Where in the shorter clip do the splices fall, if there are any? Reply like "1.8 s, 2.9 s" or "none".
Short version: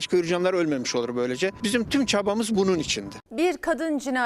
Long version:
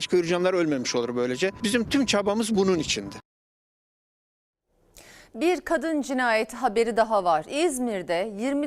3.3 s